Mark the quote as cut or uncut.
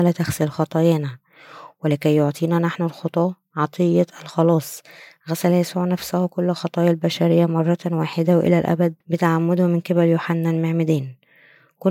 cut